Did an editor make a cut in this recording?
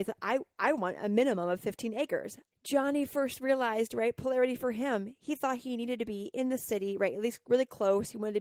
yes; 1 cut; at 2.5 s

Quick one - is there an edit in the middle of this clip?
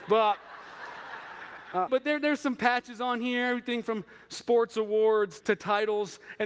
yes; 2 cuts; at 1.9 s, 5.4 s

